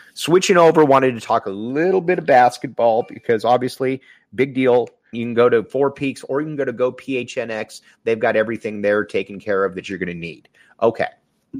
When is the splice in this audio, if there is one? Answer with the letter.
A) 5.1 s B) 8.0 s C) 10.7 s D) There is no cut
A